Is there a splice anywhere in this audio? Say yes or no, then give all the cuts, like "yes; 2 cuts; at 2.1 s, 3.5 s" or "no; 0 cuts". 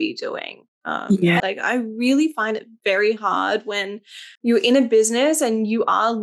yes; 2 cuts; at 1.4 s, 4.4 s